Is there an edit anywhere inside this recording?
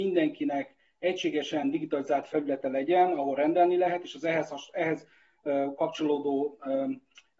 no; 0 cuts

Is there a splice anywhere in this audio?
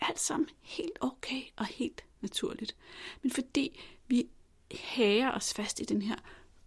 no; 0 cuts

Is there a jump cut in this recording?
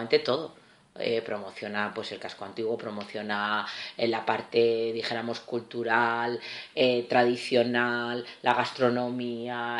no; 0 cuts

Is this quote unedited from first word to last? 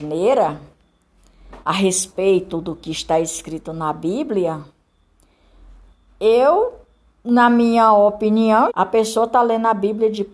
no; 2 cuts; at 1.6 s, 8.7 s

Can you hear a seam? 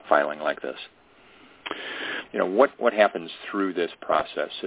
yes; 1 cut; at 2.3 s

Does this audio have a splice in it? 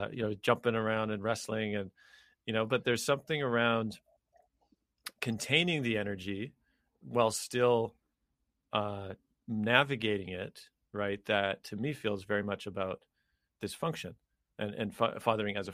no; 0 cuts

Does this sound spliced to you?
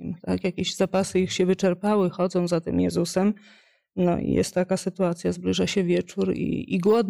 no; 0 cuts

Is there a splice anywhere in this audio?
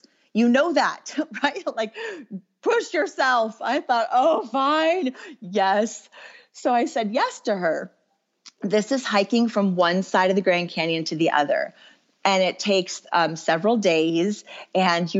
no; 0 cuts

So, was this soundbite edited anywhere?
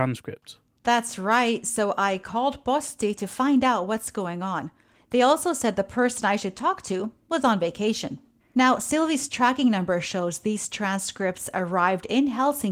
yes; 2 cuts; at 4.9 s, 8.4 s

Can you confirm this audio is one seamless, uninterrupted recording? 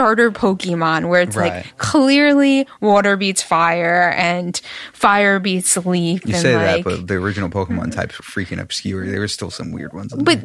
no; 1 cut; at 8.2 s

